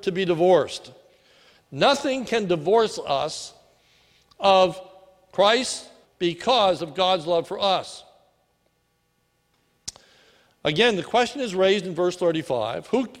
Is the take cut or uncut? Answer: cut